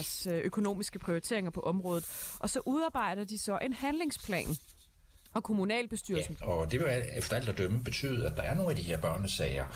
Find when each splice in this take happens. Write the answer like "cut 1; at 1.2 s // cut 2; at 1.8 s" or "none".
cut 1; at 6.4 s